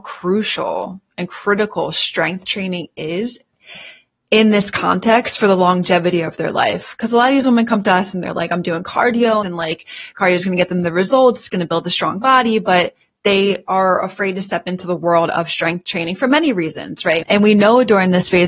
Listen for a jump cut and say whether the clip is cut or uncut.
cut